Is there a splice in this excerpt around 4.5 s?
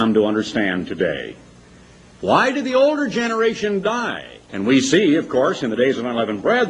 yes; 1 cut; at 4.5 s

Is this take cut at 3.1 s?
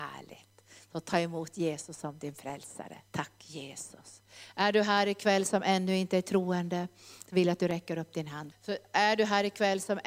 yes; 2 cuts; at 3.1 s, 8.5 s

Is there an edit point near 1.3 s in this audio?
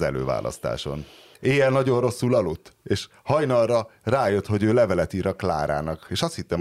yes; 1 cut; at 1.3 s

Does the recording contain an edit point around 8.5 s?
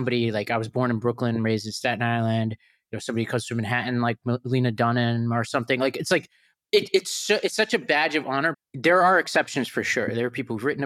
yes; 1 cut; at 8.5 s

